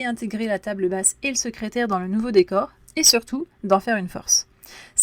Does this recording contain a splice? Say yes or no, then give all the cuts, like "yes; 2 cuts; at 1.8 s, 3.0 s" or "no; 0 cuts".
no; 0 cuts